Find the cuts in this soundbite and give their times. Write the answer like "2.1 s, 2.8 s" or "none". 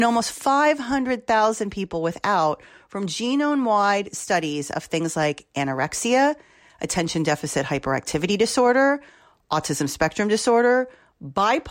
none